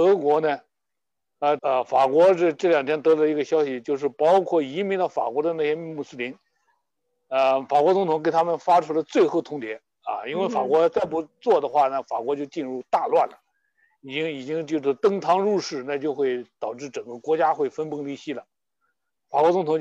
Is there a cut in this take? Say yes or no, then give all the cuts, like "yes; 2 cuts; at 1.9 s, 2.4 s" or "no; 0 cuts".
yes; 1 cut; at 1.6 s